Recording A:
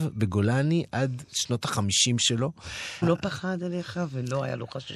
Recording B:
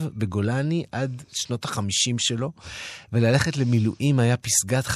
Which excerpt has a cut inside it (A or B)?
A